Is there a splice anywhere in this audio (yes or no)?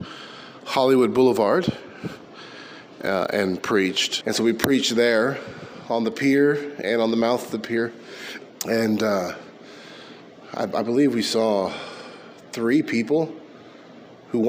yes